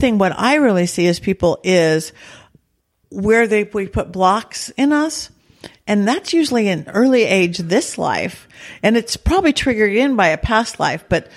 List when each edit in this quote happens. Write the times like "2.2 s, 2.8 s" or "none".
none